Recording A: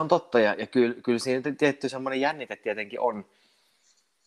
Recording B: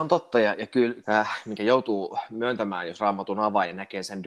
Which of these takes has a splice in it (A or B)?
B